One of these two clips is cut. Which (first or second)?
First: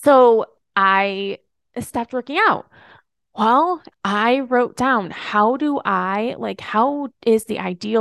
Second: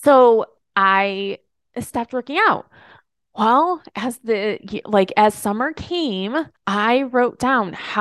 first